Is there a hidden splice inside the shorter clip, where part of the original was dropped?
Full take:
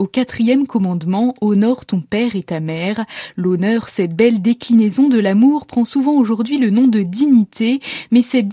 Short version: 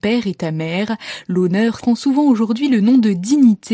yes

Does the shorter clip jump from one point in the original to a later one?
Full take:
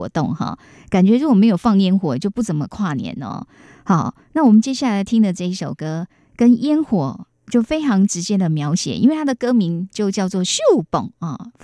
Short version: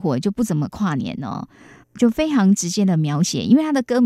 yes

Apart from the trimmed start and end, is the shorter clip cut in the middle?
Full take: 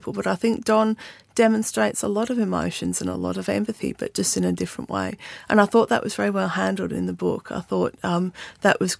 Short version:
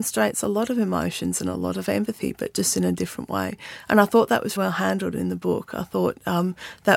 yes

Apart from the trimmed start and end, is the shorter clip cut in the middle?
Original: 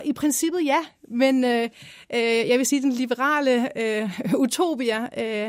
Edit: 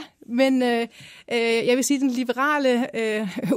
no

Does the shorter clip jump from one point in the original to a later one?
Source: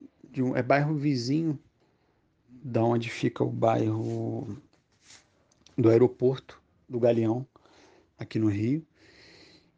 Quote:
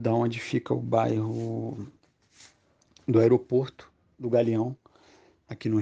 no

